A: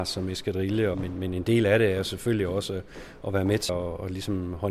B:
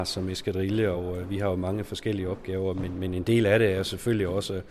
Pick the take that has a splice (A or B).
A